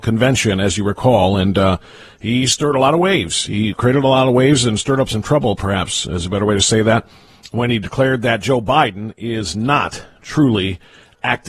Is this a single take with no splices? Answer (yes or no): yes